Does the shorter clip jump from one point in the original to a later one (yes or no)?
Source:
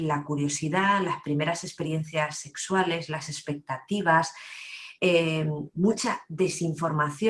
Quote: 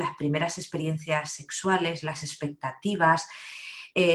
no